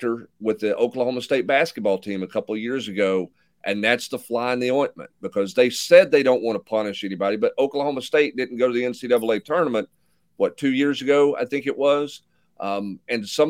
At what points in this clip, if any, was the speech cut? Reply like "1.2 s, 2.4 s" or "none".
none